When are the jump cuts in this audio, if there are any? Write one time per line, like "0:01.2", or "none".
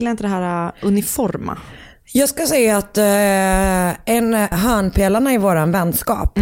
0:04.5